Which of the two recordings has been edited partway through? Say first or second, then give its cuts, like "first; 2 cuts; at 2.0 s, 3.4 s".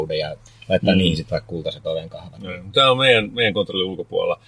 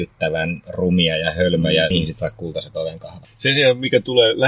second; 2 cuts; at 1.9 s, 3.2 s